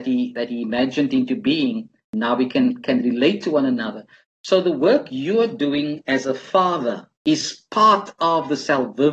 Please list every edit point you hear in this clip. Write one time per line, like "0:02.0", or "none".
0:04.2
0:07.1